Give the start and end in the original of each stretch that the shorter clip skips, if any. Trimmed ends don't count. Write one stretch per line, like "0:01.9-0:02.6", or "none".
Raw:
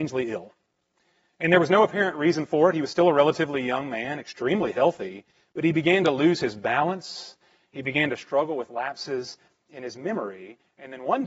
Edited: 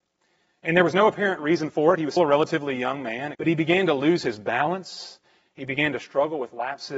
0:02.9-0:03.0
0:04.2-0:05.5